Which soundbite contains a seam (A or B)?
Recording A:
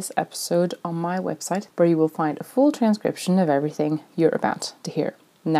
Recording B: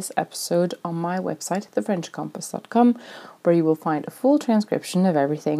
A